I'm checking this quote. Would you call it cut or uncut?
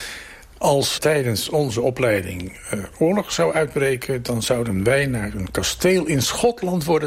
cut